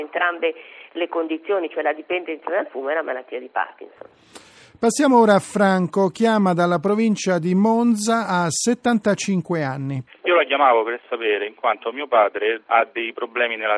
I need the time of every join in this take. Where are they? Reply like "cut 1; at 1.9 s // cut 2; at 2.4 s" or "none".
cut 1; at 10.1 s // cut 2; at 12.6 s